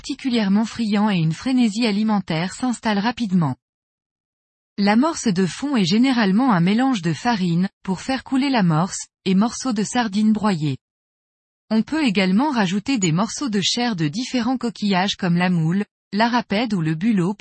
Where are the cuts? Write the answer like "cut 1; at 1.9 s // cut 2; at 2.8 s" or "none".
cut 1; at 7.8 s